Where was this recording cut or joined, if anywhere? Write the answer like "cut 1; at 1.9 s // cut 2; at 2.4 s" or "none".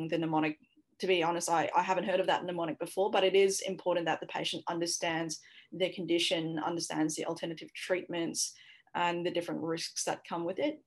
none